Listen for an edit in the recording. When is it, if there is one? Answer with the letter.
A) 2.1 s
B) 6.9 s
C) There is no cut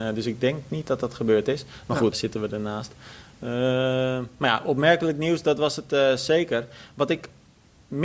A